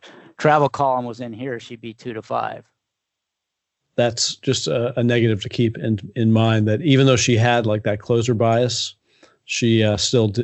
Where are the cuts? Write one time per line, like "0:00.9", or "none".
0:03.8